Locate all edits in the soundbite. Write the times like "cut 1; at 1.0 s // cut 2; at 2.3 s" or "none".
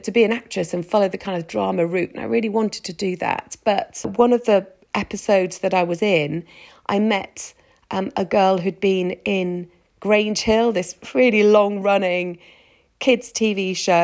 none